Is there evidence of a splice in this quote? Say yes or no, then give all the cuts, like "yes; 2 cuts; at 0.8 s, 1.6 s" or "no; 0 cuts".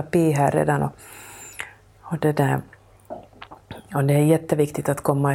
no; 0 cuts